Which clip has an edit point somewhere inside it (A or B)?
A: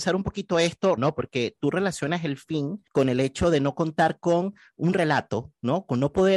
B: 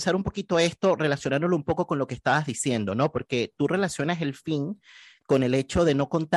A